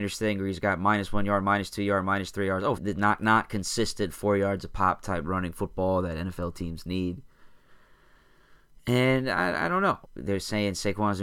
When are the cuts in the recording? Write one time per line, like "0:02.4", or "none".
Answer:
0:02.8
0:10.0

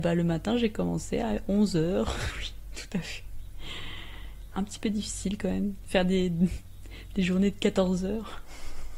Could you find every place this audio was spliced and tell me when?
0:02.3
0:04.5

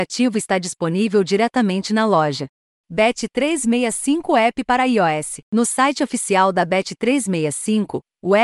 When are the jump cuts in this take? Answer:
0:02.8
0:05.4

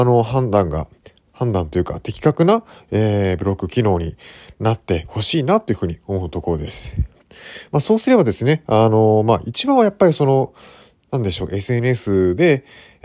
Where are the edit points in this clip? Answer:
none

